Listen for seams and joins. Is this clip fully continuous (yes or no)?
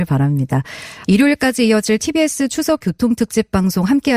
no